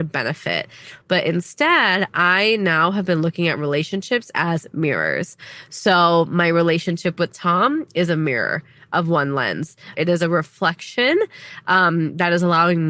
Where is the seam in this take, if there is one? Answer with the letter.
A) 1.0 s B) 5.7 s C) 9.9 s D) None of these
C